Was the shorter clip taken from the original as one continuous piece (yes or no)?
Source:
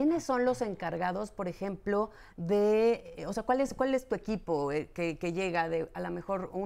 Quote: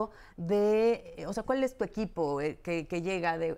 no